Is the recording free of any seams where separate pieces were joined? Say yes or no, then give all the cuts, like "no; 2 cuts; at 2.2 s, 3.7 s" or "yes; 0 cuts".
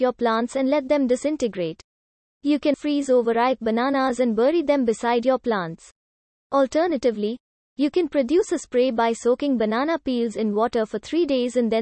no; 1 cut; at 2.7 s